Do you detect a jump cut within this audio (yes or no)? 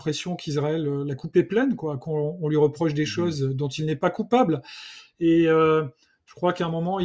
no